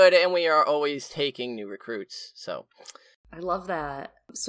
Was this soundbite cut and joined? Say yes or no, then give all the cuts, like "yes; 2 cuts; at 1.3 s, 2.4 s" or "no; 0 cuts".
no; 0 cuts